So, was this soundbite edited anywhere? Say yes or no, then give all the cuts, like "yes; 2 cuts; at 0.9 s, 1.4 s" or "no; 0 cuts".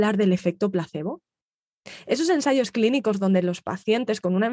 no; 0 cuts